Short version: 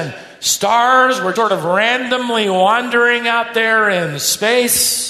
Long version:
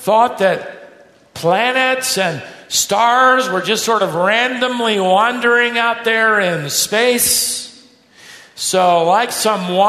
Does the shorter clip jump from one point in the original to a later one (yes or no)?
yes